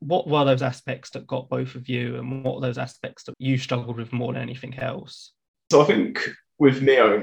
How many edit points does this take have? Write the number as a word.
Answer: one